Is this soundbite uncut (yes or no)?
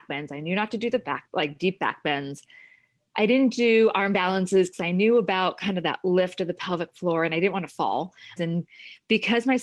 no